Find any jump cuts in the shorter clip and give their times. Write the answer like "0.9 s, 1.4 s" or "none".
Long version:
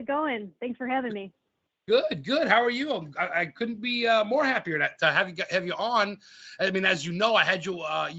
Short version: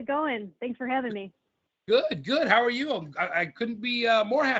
none